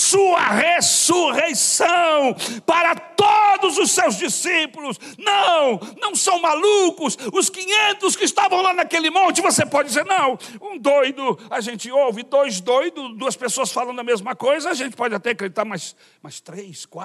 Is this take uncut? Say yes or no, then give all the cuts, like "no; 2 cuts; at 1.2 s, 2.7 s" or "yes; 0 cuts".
yes; 0 cuts